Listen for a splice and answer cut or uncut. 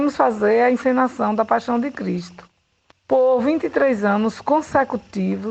uncut